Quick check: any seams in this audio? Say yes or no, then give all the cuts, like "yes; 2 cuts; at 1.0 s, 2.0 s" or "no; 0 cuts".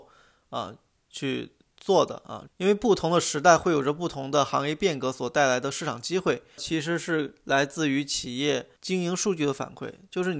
yes; 3 cuts; at 2.5 s, 6.6 s, 8.8 s